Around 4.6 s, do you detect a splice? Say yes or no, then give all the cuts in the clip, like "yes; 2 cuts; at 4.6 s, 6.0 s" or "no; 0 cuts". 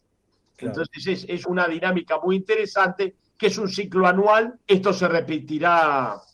yes; 2 cuts; at 1.4 s, 4.6 s